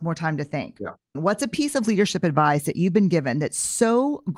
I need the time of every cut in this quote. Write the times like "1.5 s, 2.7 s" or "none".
1.1 s